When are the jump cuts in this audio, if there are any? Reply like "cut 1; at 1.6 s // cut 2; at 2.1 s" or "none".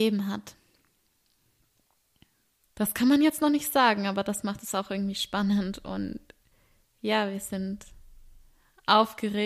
cut 1; at 2.6 s